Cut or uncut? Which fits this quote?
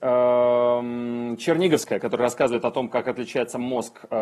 uncut